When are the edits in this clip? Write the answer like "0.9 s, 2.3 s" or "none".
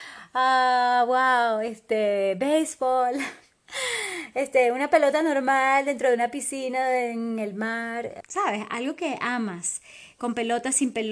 8.2 s